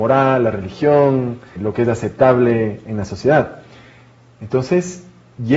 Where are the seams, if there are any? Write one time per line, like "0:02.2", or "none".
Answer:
0:01.6